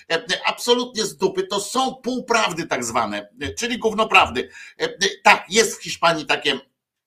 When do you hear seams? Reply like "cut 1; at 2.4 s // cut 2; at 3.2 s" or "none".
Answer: none